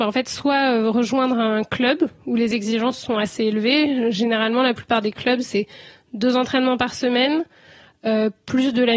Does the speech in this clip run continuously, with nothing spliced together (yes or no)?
yes